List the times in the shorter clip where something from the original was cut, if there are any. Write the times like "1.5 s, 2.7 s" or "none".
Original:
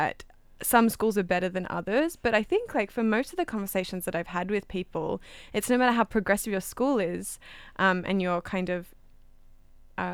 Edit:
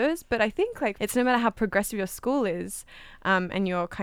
0.9 s